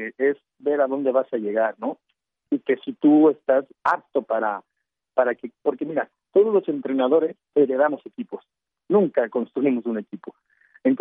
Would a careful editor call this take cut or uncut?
cut